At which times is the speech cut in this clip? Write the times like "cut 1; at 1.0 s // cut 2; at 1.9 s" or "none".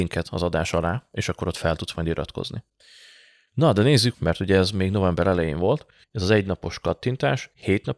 cut 1; at 4.1 s // cut 2; at 6.0 s